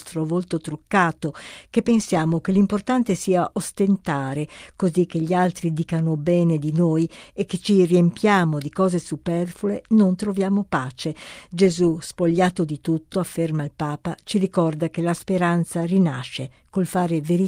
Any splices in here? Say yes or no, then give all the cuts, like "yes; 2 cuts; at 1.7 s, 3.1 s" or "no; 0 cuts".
no; 0 cuts